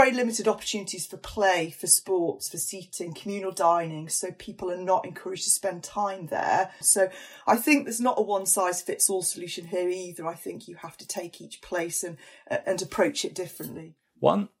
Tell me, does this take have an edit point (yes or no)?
yes